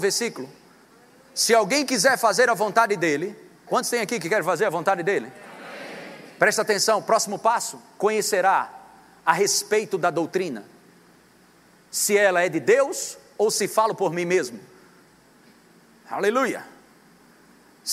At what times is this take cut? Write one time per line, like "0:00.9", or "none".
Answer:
0:03.7